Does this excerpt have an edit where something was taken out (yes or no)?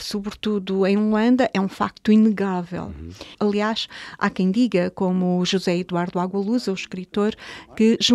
yes